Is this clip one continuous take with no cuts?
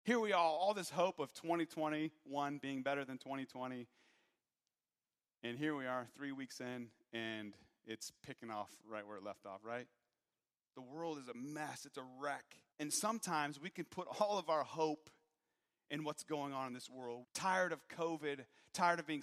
no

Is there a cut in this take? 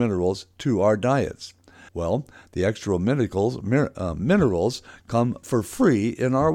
yes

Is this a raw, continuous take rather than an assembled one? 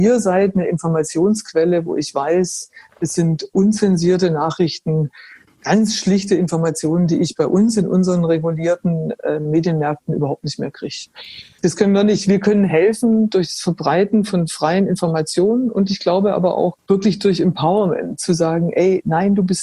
no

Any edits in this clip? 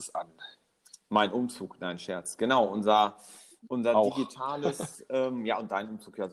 no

